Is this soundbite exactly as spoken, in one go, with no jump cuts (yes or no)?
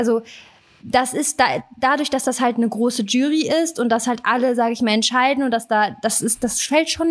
yes